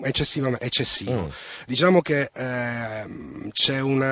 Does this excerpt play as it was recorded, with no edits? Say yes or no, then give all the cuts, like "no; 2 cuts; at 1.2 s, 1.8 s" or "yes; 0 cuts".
yes; 0 cuts